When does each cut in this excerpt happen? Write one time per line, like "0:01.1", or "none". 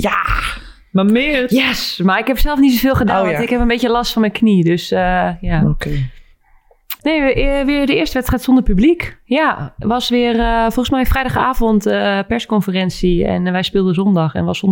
0:07.0

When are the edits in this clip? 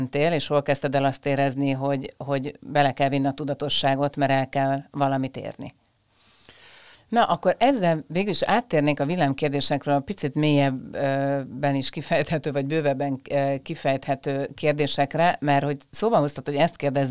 0:06.9

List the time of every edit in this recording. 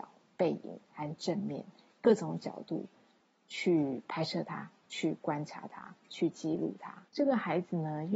0:07.1

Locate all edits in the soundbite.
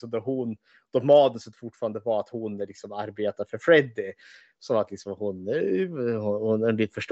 none

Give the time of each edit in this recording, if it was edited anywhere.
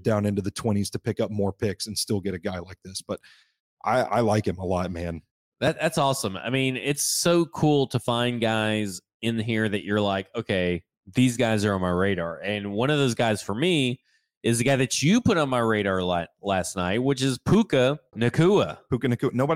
0:18.1

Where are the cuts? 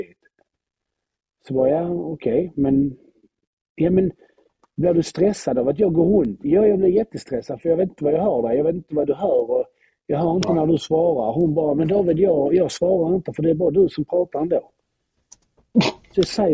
none

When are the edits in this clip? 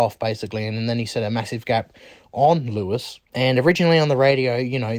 0:03.3

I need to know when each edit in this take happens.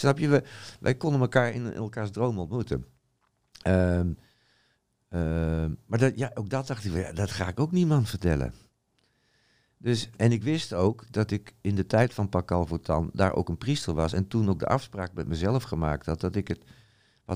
0:10.1

